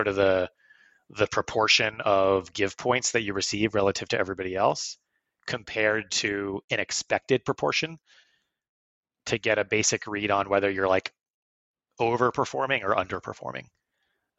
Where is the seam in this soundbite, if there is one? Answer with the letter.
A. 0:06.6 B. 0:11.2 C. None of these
A